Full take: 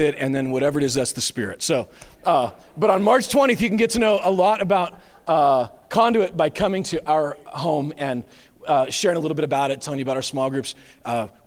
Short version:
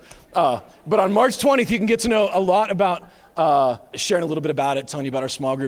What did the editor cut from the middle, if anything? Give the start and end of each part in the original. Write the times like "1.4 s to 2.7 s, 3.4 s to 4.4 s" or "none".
5.8 s to 8.9 s

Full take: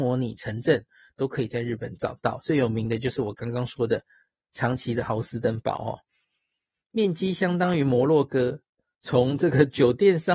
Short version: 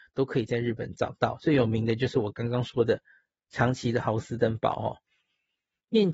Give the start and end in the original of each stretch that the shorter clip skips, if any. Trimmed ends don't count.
none

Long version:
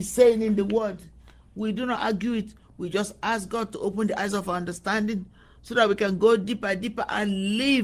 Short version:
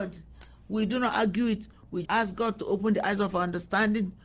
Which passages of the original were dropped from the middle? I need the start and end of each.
2.9 s to 3.2 s

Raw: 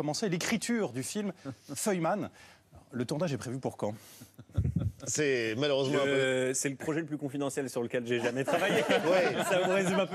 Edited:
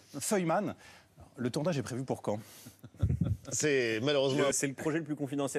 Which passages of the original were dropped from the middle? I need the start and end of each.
6.1 s to 6.5 s

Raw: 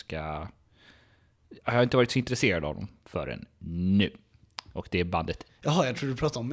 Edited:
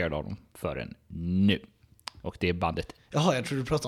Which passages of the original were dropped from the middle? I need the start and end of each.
none

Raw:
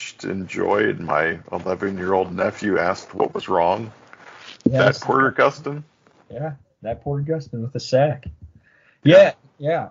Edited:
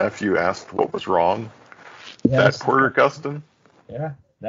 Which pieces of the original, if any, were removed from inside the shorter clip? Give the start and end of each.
none

